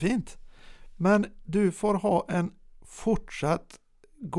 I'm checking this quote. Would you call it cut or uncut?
uncut